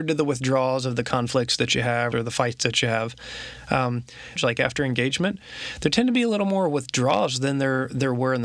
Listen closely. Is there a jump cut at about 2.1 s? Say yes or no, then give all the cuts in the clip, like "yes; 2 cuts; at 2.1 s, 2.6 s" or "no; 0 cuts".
yes; 2 cuts; at 2.1 s, 4.4 s